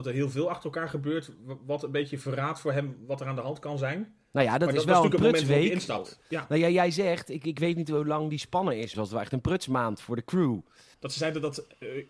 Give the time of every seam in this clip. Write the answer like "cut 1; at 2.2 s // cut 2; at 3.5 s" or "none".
cut 1; at 8.9 s // cut 2; at 10.9 s